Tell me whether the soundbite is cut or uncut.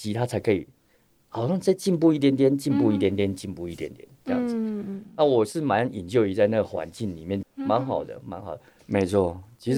cut